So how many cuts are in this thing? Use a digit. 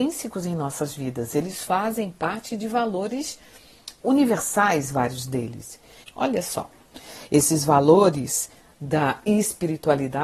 1